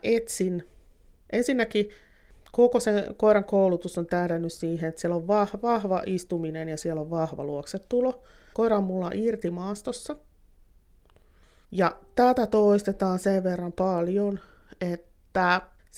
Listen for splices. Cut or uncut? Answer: cut